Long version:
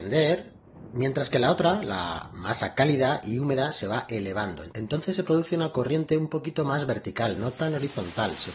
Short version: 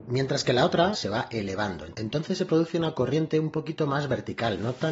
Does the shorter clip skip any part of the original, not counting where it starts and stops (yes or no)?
yes